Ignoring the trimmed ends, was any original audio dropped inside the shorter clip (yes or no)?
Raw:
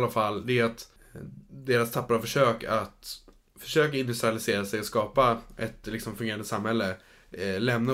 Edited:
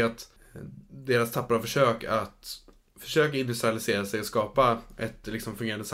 no